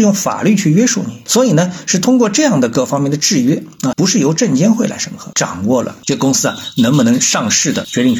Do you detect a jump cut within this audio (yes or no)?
yes